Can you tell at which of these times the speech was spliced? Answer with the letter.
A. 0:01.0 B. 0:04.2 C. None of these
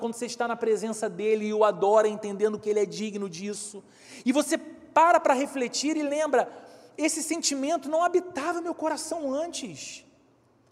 C